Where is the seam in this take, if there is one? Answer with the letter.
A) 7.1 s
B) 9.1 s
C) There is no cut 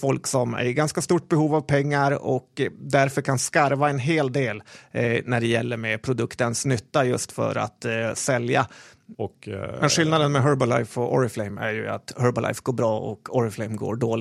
B